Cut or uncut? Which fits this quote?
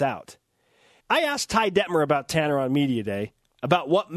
cut